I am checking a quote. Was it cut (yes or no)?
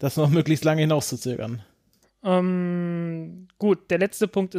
yes